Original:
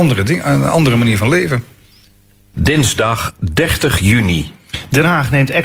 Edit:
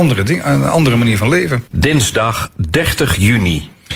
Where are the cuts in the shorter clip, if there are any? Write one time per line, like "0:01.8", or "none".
0:01.7

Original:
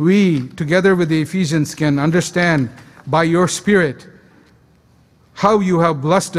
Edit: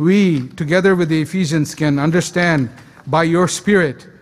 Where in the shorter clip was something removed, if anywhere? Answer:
none

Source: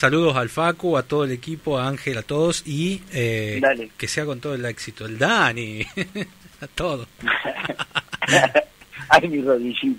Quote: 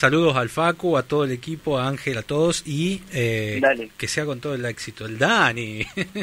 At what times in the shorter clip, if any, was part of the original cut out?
none

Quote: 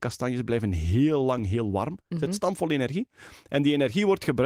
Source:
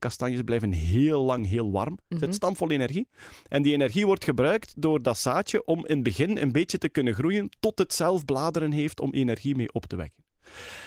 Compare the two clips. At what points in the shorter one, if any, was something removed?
none

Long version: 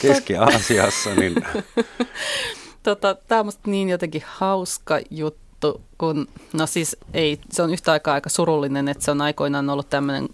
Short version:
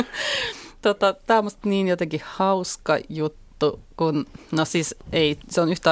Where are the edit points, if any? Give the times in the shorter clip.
none

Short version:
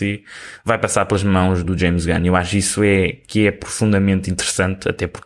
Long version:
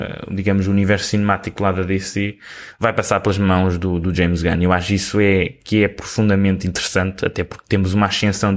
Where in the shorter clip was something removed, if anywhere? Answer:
0:01.6

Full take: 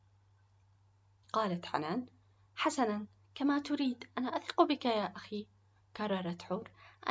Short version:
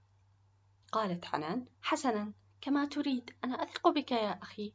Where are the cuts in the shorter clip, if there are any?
0:01.7

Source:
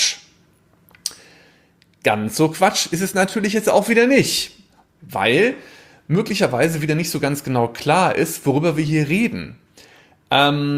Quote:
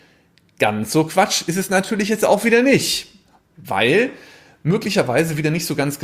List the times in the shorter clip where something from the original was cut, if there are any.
none

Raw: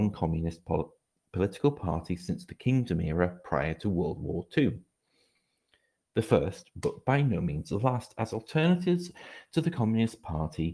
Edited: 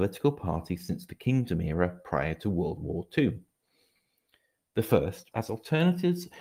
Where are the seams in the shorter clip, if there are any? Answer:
0:05.3

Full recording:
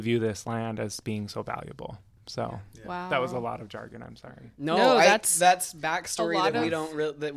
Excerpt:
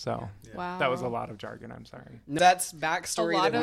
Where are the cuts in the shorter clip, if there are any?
0:02.4

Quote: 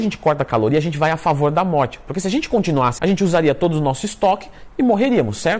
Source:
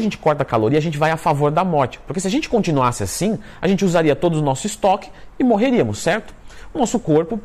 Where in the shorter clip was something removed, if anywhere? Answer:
0:03.0

